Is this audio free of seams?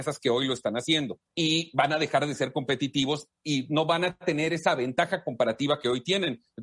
no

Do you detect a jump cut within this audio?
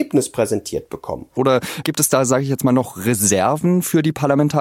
yes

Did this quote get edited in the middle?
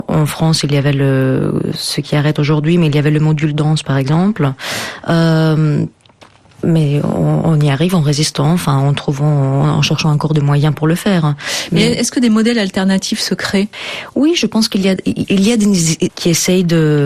yes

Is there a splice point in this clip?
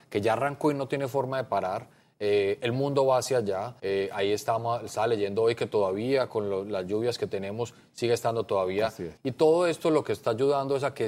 yes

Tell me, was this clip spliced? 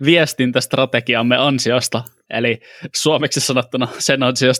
no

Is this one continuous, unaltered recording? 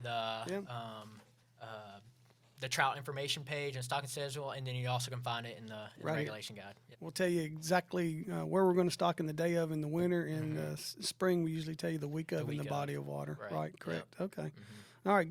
no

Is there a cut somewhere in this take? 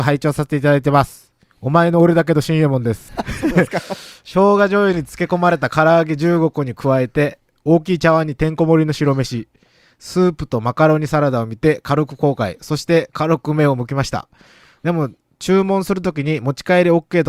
yes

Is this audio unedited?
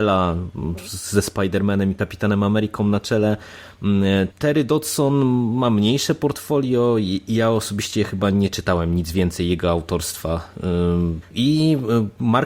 no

